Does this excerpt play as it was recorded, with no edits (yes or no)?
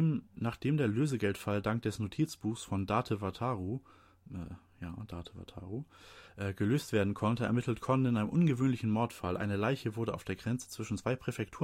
yes